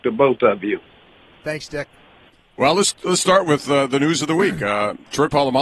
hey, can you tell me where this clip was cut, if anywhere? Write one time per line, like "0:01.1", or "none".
none